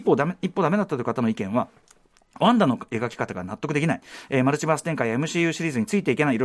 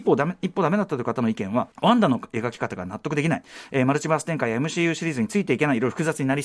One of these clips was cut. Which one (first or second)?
second